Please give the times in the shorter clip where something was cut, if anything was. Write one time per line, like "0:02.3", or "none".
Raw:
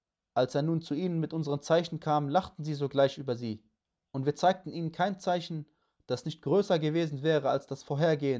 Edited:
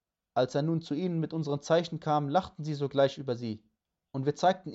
none